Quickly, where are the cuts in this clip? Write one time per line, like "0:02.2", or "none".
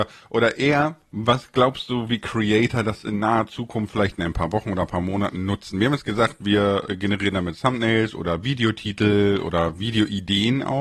none